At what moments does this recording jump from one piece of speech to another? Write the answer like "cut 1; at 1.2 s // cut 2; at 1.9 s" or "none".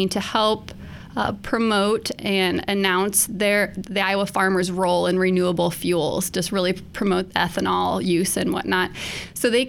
none